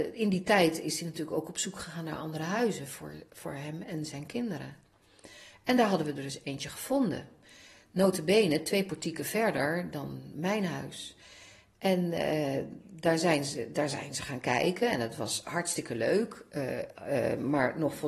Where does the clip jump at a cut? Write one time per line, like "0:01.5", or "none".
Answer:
none